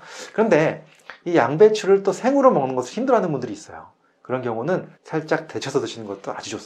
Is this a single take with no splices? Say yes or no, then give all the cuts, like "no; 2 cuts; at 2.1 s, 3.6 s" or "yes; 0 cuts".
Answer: no; 1 cut; at 4.9 s